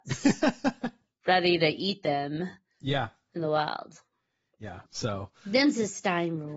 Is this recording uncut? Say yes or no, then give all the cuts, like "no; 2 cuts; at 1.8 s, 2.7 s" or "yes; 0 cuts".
no; 1 cut; at 4.9 s